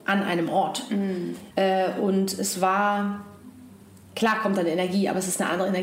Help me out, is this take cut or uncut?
cut